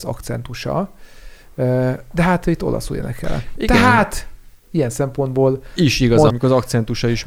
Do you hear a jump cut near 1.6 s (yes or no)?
no